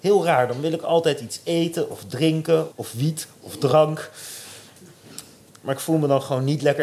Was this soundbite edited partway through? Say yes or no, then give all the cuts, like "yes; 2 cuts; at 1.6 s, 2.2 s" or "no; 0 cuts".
yes; 2 cuts; at 2.7 s, 5.5 s